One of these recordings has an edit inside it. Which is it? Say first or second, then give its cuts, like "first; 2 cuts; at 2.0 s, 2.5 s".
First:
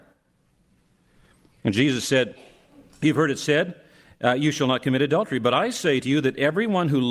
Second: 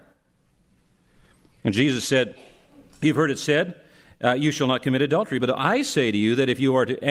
second; 1 cut; at 5.4 s